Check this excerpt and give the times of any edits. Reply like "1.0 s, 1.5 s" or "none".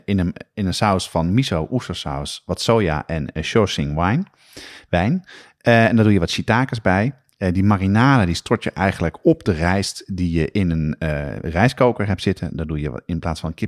none